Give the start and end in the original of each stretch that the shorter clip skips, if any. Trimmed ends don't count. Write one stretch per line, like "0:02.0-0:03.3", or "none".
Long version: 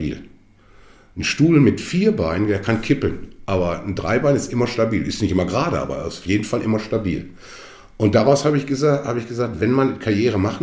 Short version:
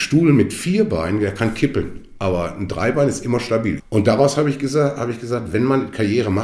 0:05.0-0:07.8